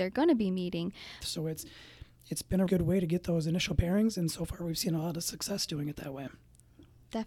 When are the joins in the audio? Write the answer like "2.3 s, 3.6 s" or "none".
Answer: 1.2 s, 2.7 s